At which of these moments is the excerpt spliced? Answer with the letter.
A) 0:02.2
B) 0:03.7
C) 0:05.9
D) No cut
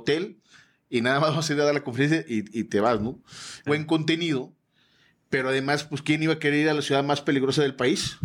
B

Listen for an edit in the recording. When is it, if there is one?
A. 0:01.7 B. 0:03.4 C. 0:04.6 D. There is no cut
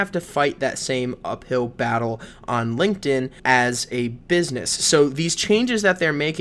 B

